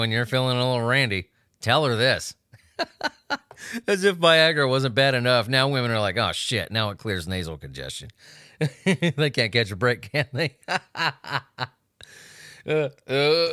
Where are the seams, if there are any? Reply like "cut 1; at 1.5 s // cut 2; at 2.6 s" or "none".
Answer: none

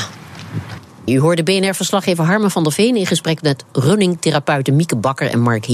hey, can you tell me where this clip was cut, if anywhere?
cut 1; at 1.1 s

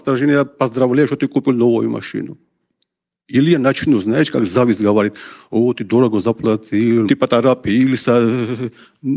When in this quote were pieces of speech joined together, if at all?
cut 1; at 7.1 s

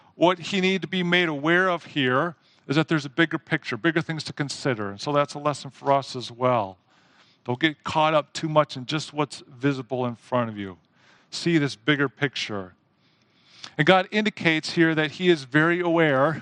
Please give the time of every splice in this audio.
none

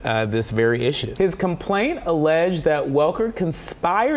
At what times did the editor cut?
cut 1; at 1.1 s

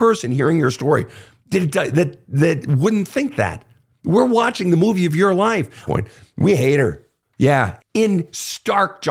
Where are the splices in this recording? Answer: cut 1; at 5.9 s // cut 2; at 7.8 s

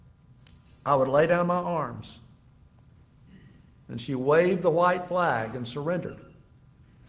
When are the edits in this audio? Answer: none

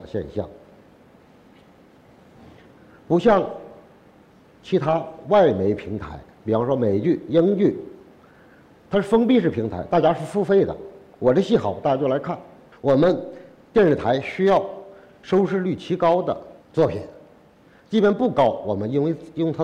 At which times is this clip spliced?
cut 1; at 12.7 s // cut 2; at 16.6 s

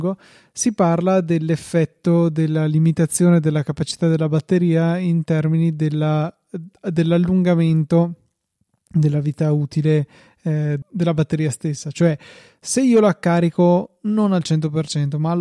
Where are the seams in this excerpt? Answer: cut 1; at 10.8 s

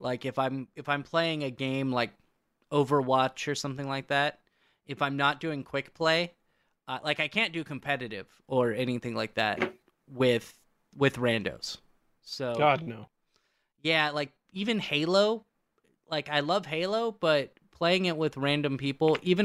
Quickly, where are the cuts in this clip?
none

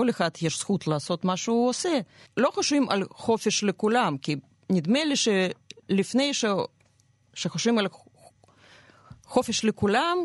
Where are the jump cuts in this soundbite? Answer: cut 1; at 2.3 s

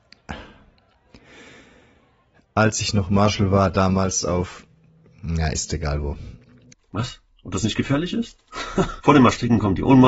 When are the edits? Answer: cut 1; at 6.7 s // cut 2; at 9.0 s

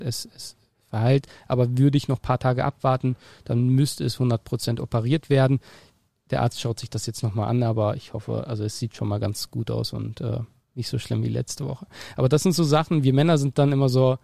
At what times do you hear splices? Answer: none

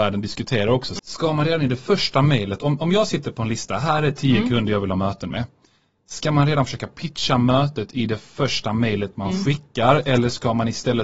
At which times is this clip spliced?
cut 1; at 1.0 s

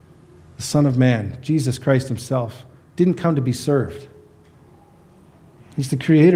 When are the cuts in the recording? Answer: none

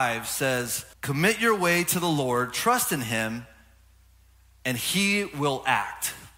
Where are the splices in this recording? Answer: cut 1; at 0.9 s

